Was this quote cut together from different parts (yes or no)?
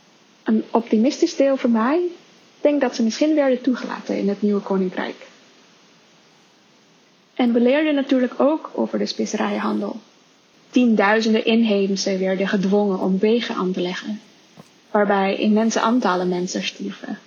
yes